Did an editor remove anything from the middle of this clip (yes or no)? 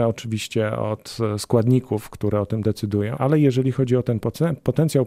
yes